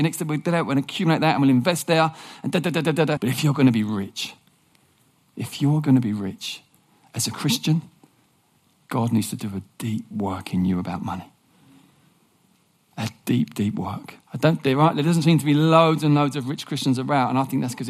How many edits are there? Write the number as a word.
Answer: three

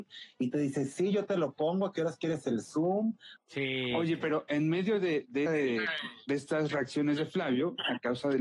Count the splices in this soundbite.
two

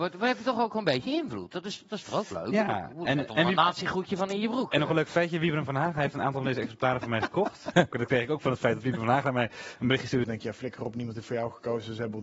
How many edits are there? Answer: two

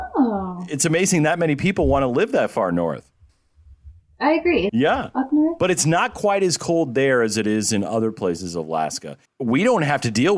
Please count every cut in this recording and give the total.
two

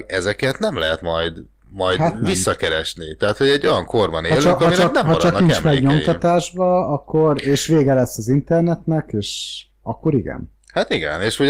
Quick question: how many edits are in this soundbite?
zero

